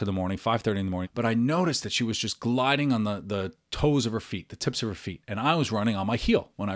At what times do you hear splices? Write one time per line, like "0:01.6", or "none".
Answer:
0:01.0